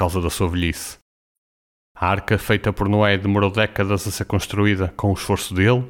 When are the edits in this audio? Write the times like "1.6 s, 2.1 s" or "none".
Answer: none